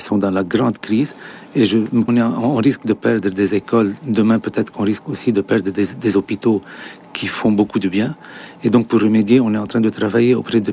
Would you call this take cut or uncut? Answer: cut